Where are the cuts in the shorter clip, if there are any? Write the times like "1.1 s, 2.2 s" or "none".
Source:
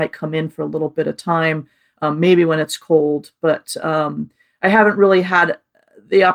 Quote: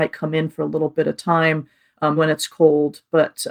2.2 s